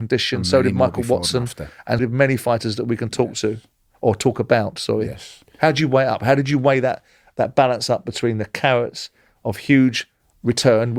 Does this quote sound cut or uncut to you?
cut